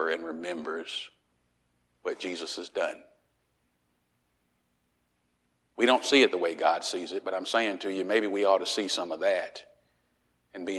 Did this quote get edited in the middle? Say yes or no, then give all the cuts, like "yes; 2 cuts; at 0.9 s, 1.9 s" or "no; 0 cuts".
no; 0 cuts